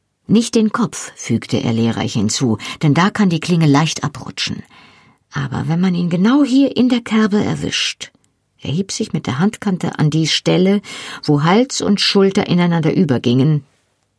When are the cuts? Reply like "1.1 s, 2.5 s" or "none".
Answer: none